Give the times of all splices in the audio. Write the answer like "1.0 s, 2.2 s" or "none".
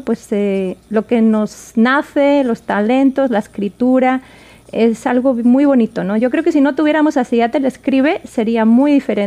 none